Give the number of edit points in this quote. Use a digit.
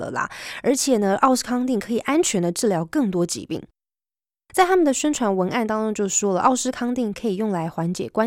0